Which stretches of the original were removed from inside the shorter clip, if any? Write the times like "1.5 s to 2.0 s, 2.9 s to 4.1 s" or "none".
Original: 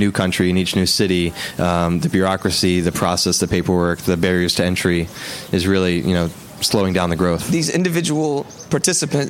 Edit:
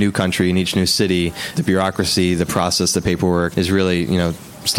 1.5 s to 2.0 s, 4.0 s to 5.5 s